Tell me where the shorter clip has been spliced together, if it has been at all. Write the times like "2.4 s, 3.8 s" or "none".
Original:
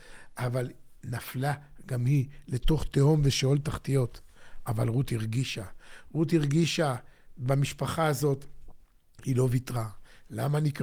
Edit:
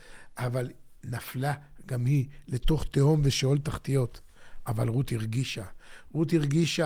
none